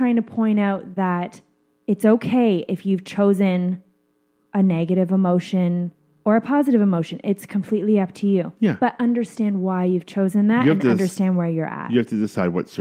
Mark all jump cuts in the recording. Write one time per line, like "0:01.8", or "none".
none